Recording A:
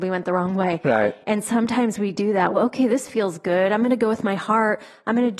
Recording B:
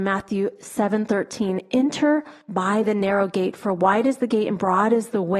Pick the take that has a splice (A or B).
A